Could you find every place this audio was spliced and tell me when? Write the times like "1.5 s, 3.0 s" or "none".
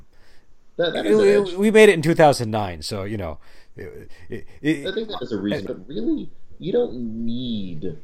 5.7 s

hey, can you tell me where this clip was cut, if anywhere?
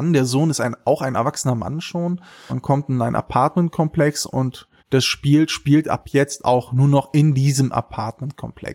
2.5 s, 4.8 s

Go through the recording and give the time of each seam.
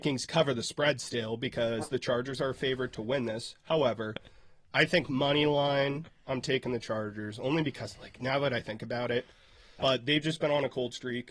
9.8 s

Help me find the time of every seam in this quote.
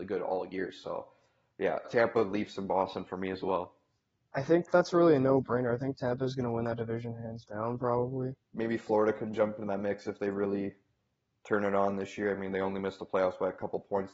1.8 s, 8.4 s

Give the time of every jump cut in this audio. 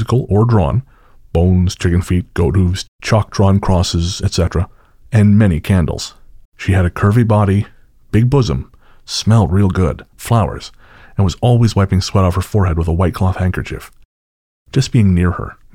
6.4 s, 10.1 s

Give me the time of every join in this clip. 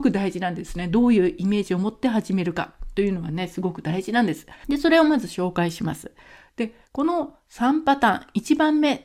4.6 s

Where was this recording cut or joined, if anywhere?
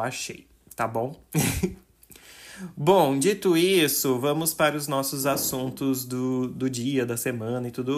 none

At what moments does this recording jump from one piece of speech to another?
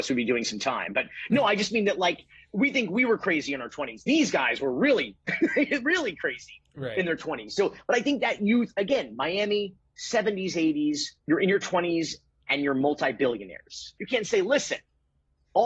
11.2 s, 14.0 s

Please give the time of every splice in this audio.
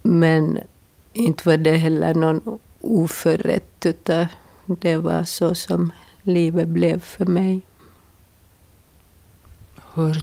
none

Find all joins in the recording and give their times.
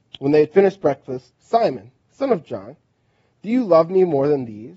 1.3 s

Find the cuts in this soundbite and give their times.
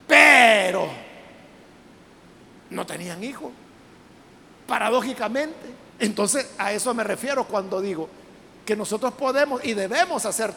5.9 s

